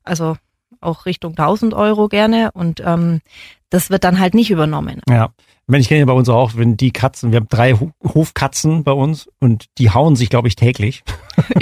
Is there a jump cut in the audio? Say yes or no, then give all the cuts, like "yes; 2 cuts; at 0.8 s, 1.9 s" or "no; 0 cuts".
yes; 1 cut; at 5.0 s